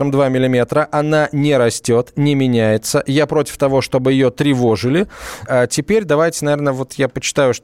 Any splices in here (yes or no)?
yes